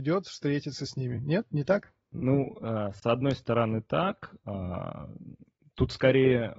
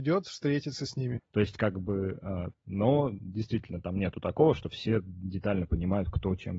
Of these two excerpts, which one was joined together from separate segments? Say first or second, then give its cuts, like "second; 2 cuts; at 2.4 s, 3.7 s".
second; 2 cuts; at 1.2 s, 2.5 s